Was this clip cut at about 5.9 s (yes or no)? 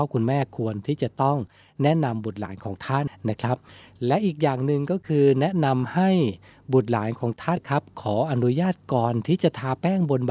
no